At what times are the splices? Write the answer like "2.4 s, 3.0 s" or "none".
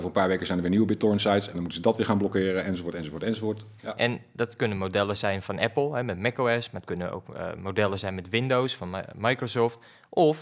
3.8 s